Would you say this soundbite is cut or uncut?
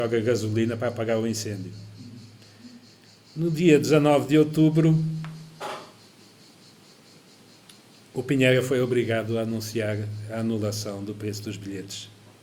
uncut